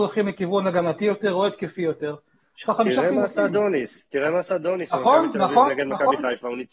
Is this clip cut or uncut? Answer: uncut